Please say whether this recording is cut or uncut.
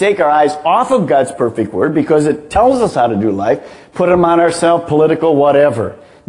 uncut